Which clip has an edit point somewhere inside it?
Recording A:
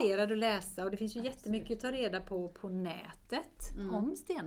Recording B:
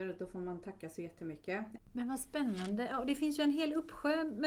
B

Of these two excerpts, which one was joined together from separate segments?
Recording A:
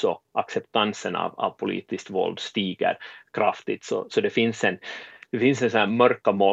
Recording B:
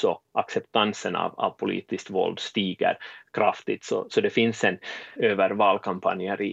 B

